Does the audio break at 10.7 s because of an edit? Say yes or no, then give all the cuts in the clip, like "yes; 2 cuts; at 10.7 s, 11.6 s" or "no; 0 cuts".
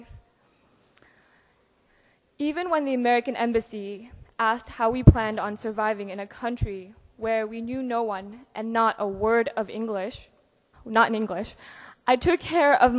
yes; 1 cut; at 10.7 s